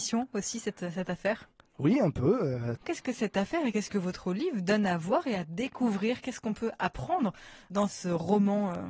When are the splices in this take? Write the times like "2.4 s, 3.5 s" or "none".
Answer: 2.8 s